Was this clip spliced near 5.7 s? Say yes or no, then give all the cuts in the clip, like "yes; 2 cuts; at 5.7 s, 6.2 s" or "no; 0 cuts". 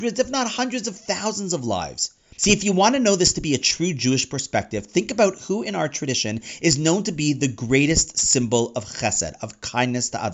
no; 1 cut; at 2.4 s